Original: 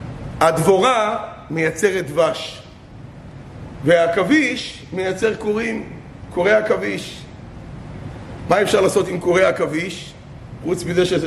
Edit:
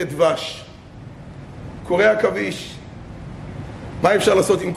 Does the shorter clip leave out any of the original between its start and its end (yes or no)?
yes